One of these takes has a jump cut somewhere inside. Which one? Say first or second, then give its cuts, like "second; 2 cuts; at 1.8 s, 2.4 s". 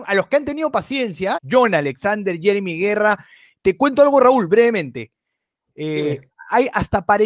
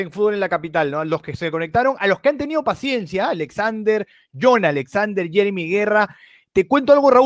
first; 1 cut; at 1.3 s